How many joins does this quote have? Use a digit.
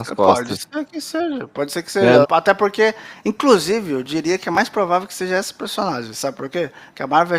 1